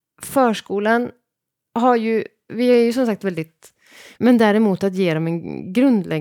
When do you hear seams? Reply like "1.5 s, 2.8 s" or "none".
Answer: 2.5 s, 4.2 s